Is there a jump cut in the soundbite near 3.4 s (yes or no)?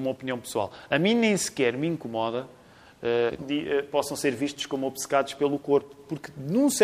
yes